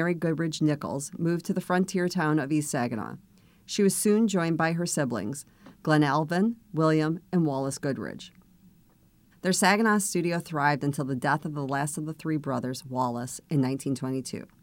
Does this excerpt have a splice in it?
yes; 1 cut; at 9.3 s

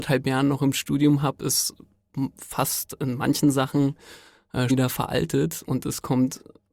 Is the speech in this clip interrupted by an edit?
yes; 1 cut; at 4.7 s

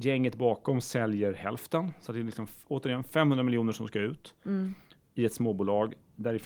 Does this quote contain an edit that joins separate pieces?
no; 0 cuts

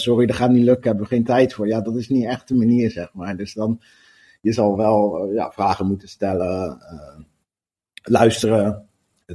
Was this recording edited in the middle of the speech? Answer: no; 0 cuts

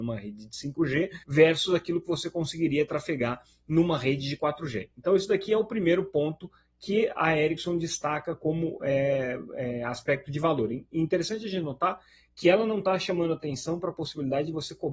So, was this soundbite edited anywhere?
yes; 1 cut; at 1.2 s

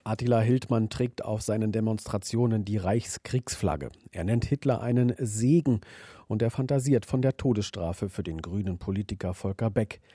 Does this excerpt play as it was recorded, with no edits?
yes; 0 cuts

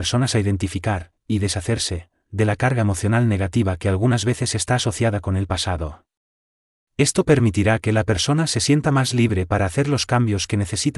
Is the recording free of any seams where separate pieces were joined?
yes; 0 cuts

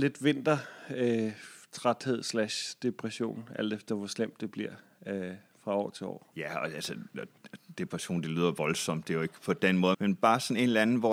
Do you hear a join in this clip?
yes; 2 cuts; at 6.3 s, 9.9 s

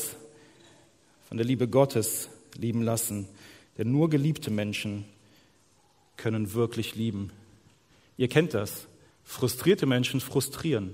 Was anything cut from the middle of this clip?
yes; 1 cut; at 9.1 s

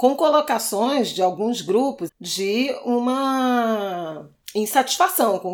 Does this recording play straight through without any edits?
no; 1 cut; at 2.1 s

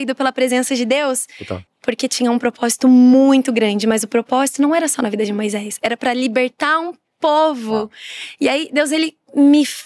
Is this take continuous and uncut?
no; 1 cut; at 1.7 s

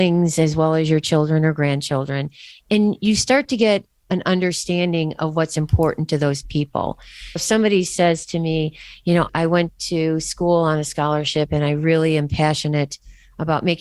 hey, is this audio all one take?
no; 2 cuts; at 7.4 s, 9.3 s

